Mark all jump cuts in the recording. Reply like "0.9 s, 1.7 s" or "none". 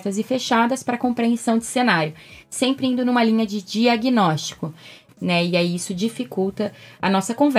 5.1 s